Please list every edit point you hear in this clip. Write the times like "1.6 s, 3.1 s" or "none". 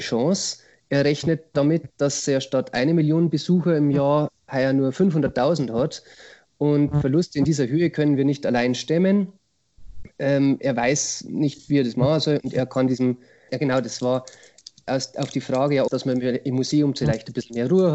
13.5 s, 15.9 s